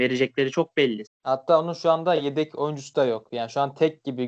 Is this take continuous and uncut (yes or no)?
no